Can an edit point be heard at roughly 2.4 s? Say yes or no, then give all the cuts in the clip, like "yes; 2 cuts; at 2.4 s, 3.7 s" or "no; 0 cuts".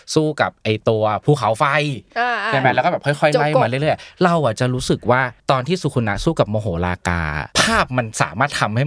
no; 2 cuts; at 5.4 s, 7.5 s